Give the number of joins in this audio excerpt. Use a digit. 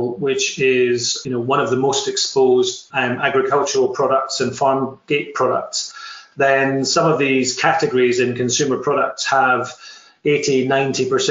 1